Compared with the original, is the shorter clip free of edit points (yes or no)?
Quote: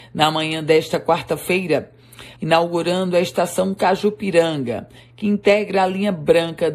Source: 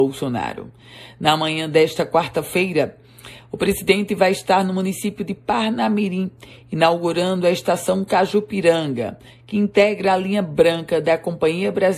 no